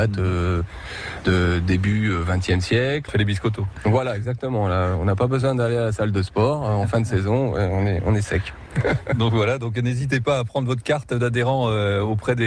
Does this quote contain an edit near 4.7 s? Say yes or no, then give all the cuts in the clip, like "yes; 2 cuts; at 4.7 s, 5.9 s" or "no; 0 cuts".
no; 1 cut; at 3.1 s